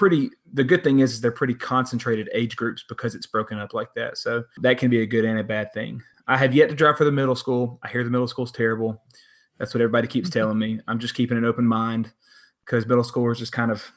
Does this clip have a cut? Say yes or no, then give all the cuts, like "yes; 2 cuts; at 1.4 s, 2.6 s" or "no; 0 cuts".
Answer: no; 0 cuts